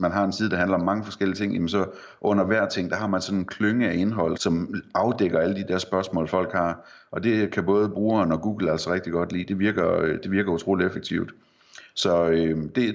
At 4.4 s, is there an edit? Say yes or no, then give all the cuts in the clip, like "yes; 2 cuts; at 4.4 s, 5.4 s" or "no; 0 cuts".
yes; 1 cut; at 4.4 s